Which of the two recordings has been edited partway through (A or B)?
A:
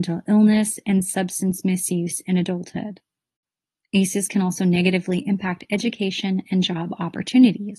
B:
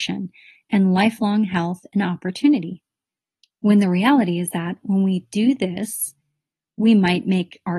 B